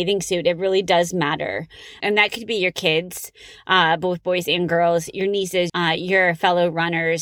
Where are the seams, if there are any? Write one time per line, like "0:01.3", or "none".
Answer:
0:02.0
0:05.7